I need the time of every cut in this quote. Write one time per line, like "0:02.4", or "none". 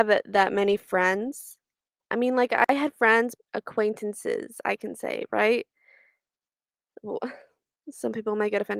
0:03.4